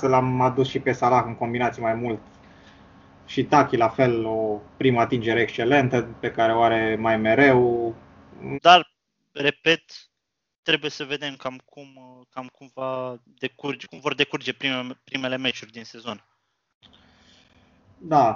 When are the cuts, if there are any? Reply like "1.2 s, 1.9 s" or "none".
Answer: 8.5 s